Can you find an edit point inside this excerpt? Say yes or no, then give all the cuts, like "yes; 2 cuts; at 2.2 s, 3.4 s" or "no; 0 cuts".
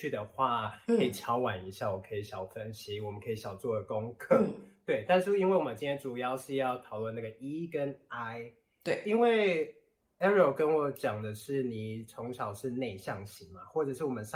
no; 0 cuts